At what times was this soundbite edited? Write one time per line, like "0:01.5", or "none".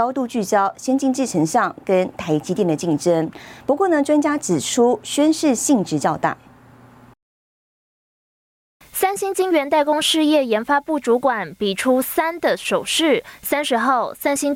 none